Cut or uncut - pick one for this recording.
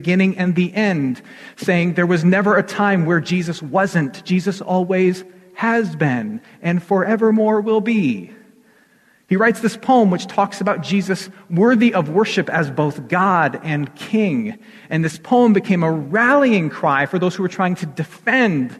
uncut